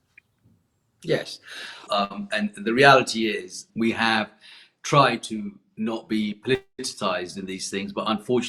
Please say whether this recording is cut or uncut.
cut